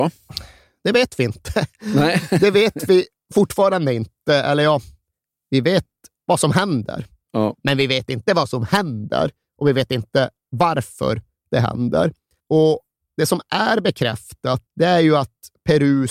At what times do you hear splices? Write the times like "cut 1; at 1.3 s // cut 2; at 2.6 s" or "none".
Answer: cut 1; at 12.4 s // cut 2; at 14.7 s

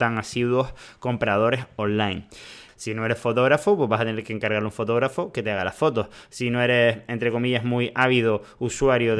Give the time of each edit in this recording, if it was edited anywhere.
cut 1; at 2.7 s

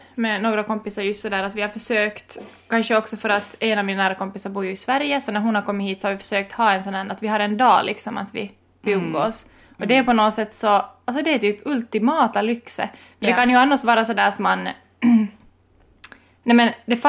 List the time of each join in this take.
none

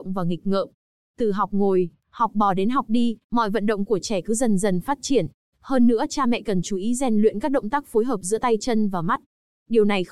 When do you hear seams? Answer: cut 1; at 5.5 s

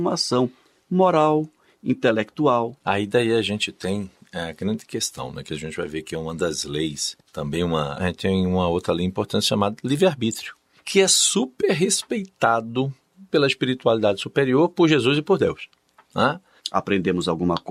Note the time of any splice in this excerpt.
cut 1; at 8.0 s // cut 2; at 16.6 s

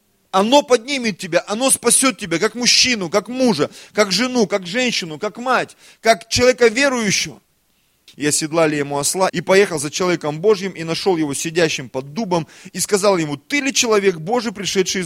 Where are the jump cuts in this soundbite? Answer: cut 1; at 8.1 s // cut 2; at 9.3 s

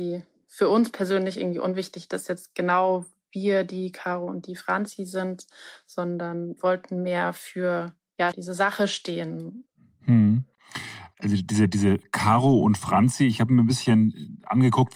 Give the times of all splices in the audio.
cut 1; at 8.3 s

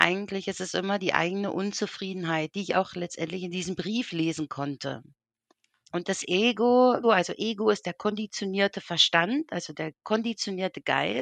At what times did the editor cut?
cut 1; at 7.0 s

